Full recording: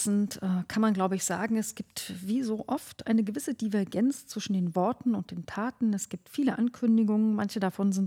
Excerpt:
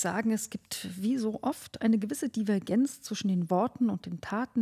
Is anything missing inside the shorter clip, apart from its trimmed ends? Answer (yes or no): no